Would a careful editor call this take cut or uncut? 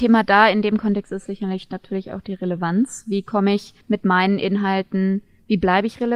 cut